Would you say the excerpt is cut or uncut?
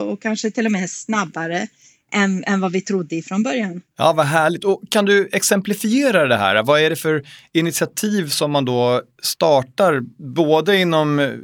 uncut